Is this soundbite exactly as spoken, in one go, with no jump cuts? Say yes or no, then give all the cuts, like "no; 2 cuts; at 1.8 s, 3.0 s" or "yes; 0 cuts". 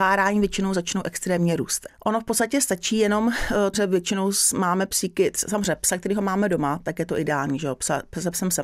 no; 2 cuts; at 1.9 s, 3.7 s